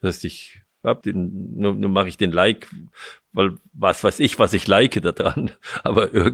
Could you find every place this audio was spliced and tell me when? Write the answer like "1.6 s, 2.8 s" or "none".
1.0 s